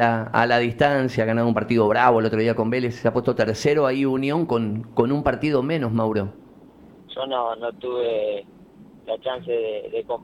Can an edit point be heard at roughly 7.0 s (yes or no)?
yes